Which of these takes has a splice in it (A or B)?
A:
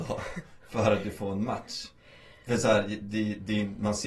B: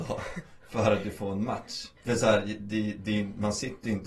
B